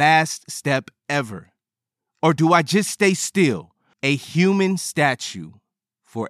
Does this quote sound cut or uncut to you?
cut